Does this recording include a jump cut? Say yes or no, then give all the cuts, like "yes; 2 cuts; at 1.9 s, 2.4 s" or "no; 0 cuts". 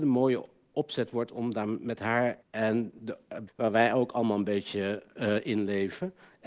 yes; 2 cuts; at 2.4 s, 3.5 s